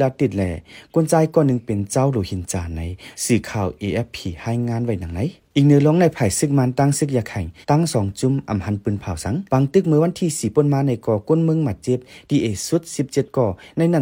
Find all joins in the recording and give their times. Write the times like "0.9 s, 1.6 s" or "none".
7.6 s, 9.5 s